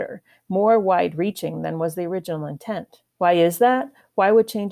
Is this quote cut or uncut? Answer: cut